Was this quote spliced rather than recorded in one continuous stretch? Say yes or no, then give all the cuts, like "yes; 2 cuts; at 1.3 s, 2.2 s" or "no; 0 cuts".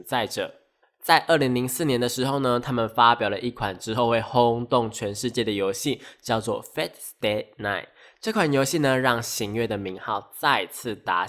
no; 0 cuts